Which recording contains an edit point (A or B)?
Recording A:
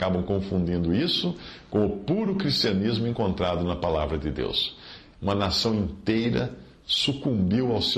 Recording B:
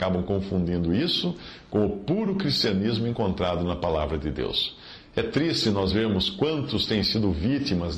A